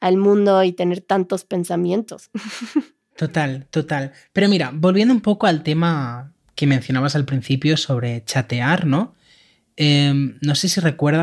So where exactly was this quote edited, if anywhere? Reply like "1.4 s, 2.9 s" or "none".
none